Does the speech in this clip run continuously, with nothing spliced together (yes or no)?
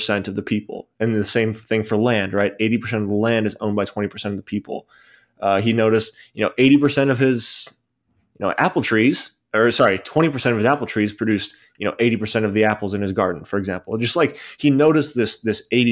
yes